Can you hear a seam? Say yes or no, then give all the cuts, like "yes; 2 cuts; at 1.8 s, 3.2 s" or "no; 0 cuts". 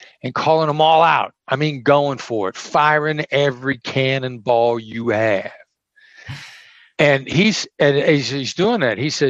no; 0 cuts